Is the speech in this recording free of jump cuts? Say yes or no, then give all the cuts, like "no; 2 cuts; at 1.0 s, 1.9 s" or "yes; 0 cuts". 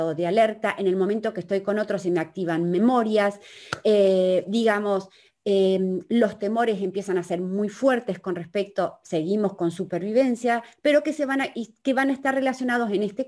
yes; 0 cuts